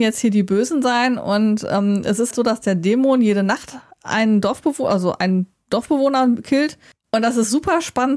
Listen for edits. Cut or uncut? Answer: cut